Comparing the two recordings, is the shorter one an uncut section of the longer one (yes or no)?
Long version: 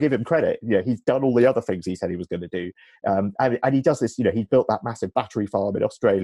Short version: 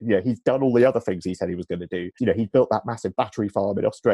no